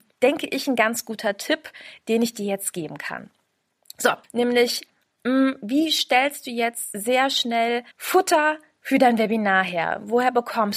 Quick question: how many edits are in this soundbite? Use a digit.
2